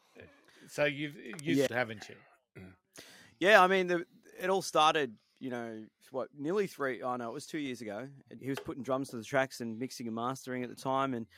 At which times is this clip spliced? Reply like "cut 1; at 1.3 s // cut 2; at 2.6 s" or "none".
cut 1; at 1.7 s // cut 2; at 8.4 s